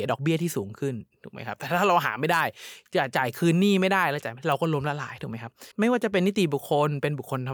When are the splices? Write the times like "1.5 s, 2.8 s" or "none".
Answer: 5.7 s